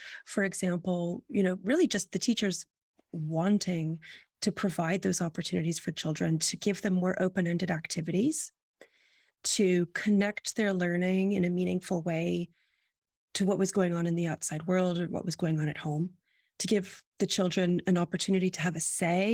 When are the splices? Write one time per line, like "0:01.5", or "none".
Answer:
none